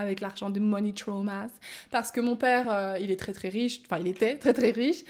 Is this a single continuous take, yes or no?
yes